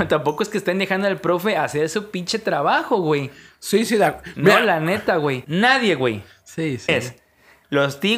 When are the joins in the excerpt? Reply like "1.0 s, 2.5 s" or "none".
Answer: 5.4 s, 6.9 s